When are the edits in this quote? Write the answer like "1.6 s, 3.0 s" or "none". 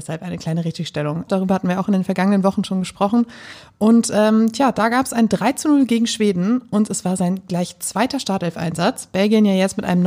1.3 s